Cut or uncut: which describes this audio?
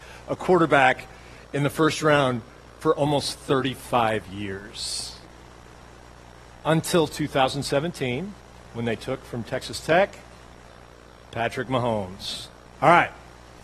uncut